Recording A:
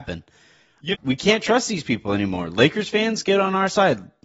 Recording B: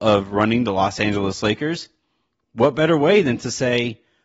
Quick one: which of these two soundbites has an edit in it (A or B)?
A